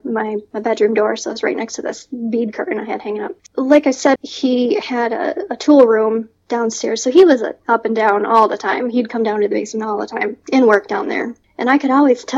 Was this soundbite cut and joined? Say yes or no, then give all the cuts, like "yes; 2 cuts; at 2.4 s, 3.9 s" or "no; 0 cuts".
yes; 1 cut; at 4.2 s